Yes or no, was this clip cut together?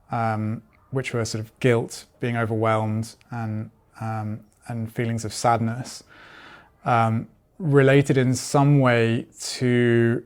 no